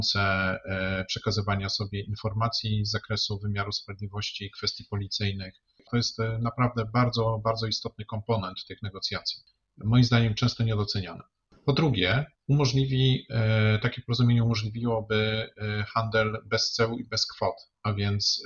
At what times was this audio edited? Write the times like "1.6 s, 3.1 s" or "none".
5.9 s, 12.4 s